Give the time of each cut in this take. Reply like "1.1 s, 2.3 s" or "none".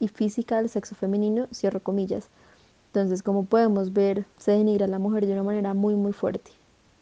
none

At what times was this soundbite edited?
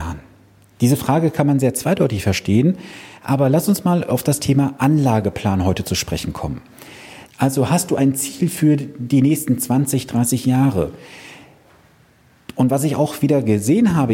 7.3 s

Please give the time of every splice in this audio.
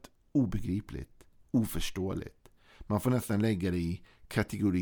none

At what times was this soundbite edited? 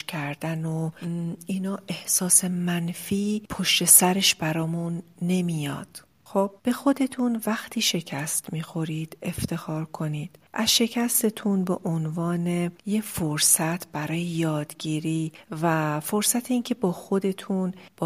6.6 s, 10.5 s

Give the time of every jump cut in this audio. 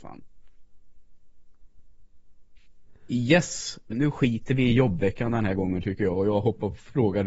3.9 s

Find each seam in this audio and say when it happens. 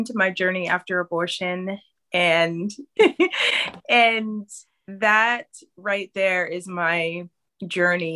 3.0 s

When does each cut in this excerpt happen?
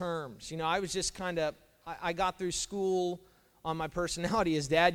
none

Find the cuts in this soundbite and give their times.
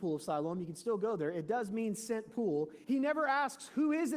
2.8 s

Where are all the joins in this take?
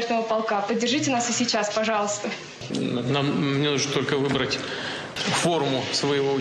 2.7 s

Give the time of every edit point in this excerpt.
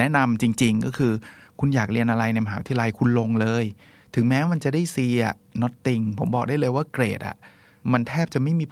none

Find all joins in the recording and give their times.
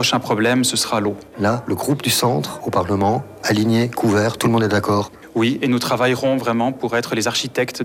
none

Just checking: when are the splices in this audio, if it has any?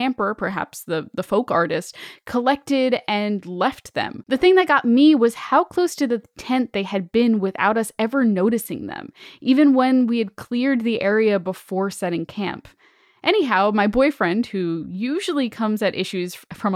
none

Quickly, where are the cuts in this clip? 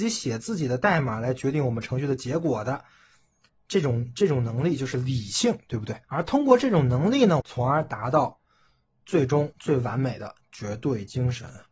6.0 s, 7.4 s

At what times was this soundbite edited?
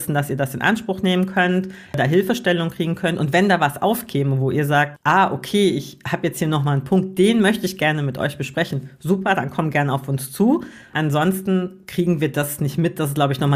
none

